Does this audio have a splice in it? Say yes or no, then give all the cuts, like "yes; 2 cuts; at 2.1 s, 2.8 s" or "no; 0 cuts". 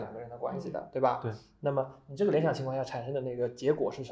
no; 0 cuts